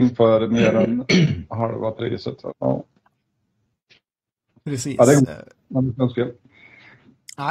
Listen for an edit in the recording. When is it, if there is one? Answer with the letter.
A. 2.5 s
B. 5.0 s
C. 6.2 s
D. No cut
A